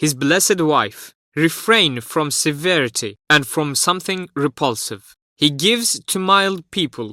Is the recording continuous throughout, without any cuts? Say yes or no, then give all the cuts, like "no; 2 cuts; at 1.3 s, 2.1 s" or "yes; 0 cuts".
no; 2 cuts; at 1.3 s, 5.2 s